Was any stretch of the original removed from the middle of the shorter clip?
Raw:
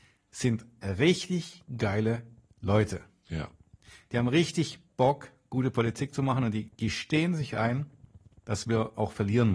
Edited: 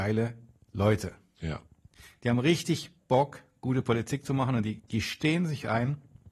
no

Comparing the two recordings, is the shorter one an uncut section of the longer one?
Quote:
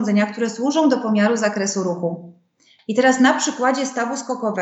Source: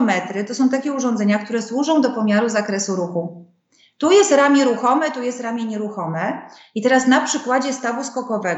no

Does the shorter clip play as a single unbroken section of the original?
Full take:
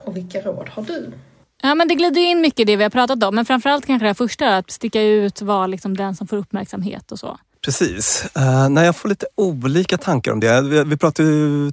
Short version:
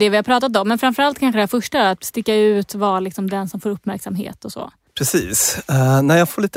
yes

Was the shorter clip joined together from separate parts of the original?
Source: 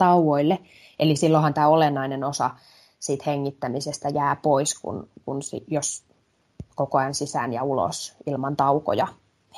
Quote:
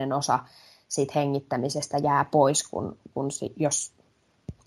no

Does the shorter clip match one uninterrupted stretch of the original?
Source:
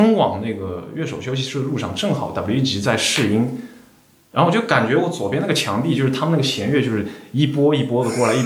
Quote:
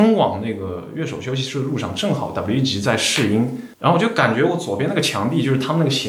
no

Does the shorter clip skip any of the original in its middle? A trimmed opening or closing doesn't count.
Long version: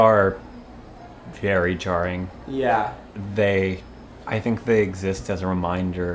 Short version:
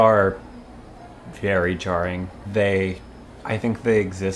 yes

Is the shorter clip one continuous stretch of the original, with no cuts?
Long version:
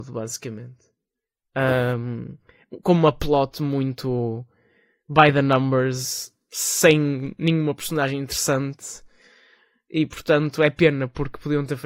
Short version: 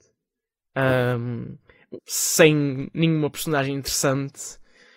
no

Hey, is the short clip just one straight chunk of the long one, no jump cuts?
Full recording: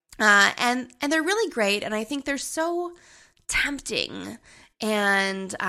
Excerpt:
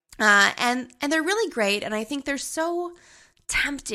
yes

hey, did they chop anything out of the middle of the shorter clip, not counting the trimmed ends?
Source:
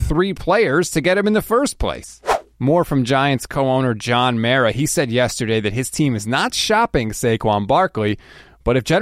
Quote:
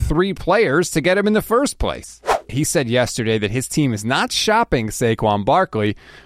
yes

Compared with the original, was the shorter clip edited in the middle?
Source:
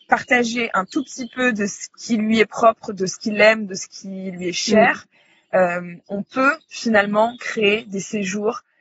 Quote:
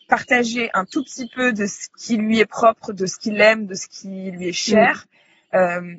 no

